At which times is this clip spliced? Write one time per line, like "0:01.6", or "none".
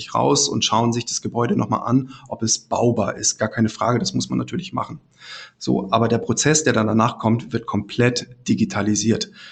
none